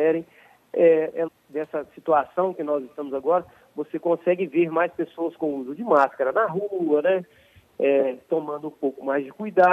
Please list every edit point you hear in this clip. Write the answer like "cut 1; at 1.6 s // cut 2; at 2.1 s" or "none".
cut 1; at 1.3 s